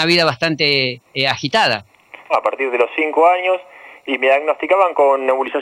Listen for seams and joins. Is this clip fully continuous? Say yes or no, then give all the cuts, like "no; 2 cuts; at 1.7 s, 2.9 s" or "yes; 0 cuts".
no; 1 cut; at 2.3 s